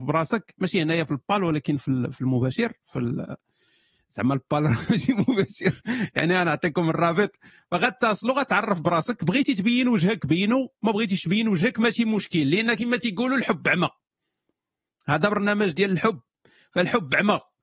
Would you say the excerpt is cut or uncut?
uncut